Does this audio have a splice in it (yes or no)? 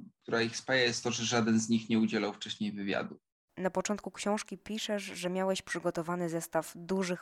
no